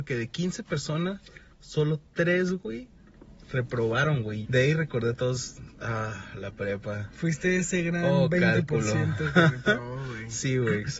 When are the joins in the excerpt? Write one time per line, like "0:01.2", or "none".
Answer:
0:04.4